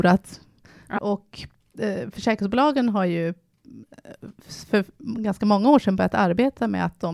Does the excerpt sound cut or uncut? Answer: cut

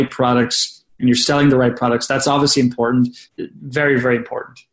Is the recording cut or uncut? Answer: cut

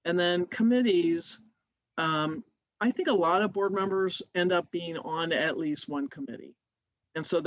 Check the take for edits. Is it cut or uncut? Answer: uncut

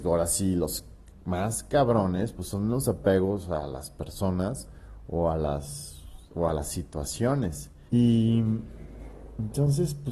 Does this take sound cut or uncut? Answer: cut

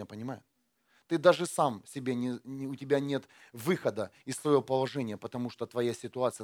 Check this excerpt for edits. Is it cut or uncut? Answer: uncut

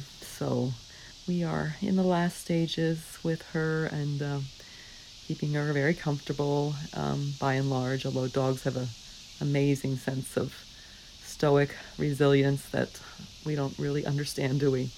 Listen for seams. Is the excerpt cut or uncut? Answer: uncut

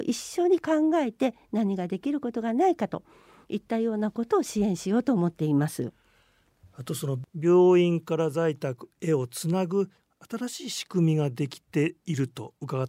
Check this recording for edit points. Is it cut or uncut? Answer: uncut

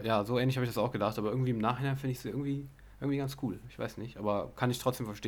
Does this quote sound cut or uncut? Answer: uncut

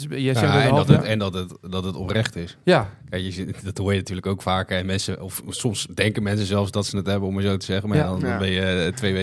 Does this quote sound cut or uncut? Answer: uncut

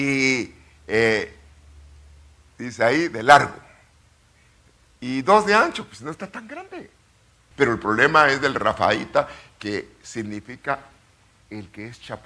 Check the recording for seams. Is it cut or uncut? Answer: cut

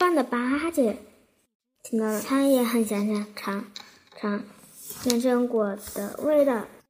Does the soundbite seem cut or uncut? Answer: uncut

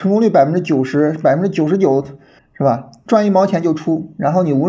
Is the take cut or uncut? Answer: cut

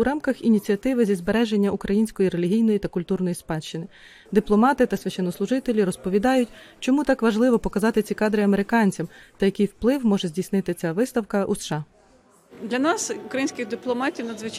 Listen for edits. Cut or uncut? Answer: uncut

